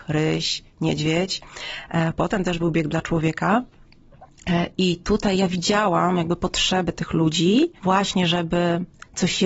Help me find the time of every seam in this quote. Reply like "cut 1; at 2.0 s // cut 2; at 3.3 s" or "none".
cut 1; at 7.8 s